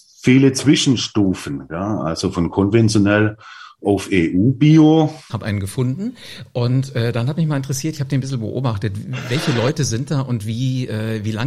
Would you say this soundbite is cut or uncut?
cut